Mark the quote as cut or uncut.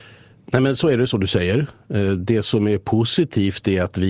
uncut